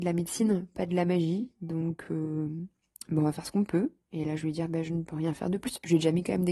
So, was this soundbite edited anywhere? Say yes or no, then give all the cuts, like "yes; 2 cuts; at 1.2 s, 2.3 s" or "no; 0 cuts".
no; 0 cuts